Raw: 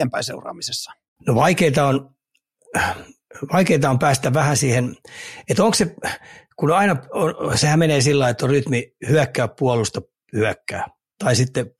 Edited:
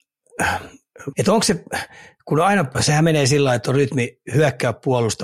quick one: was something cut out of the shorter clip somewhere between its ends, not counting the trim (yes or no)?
yes